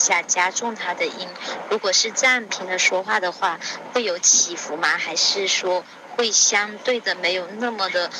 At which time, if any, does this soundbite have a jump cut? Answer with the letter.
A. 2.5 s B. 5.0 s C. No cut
A